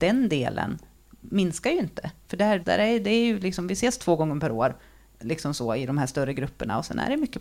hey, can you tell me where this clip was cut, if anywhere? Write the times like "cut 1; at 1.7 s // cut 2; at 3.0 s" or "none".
cut 1; at 2.6 s

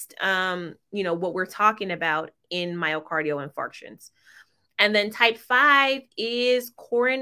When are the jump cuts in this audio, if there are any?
none

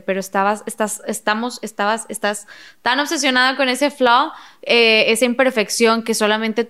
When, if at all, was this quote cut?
none

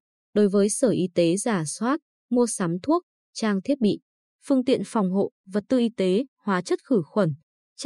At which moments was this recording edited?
none

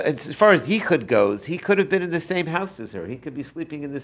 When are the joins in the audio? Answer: none

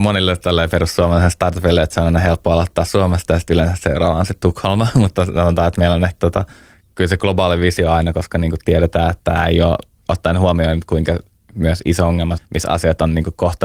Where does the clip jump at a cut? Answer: cut 1; at 6.2 s // cut 2; at 12.4 s

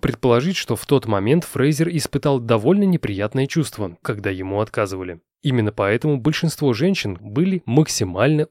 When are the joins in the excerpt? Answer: cut 1; at 4.0 s // cut 2; at 7.2 s

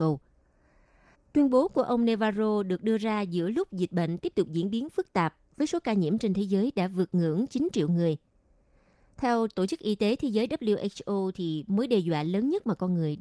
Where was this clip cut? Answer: cut 1; at 1.1 s

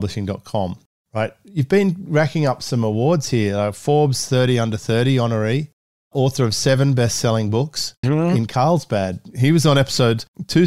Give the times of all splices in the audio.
cut 1; at 8.0 s // cut 2; at 9.3 s

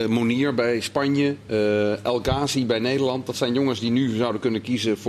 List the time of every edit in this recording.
none

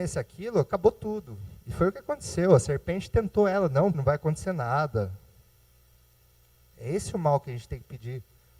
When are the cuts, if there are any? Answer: cut 1; at 3.9 s

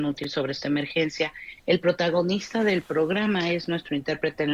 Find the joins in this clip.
none

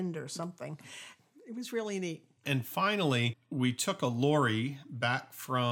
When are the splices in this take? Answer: cut 1; at 2.4 s

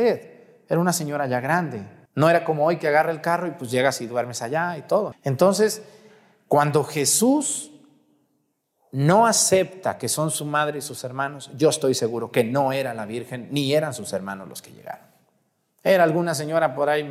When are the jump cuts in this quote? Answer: cut 1; at 2.1 s // cut 2; at 5.1 s

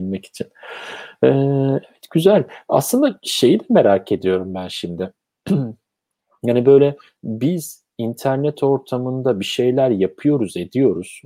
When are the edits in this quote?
none

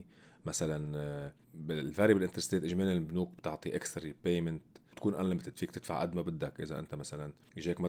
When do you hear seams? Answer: cut 1; at 1.4 s

